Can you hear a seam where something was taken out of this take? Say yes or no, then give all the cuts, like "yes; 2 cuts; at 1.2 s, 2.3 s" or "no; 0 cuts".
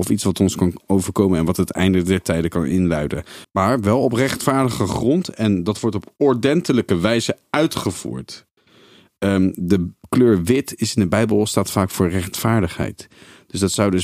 yes; 1 cut; at 3.4 s